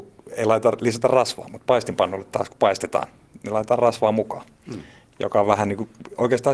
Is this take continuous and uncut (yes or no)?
yes